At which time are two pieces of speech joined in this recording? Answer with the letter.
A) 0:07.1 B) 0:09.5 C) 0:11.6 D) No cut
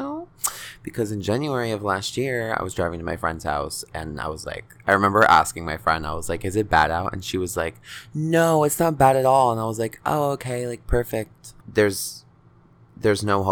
C